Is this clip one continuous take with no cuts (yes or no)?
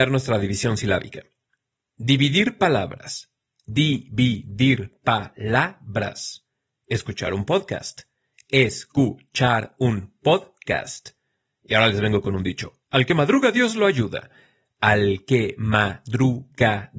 yes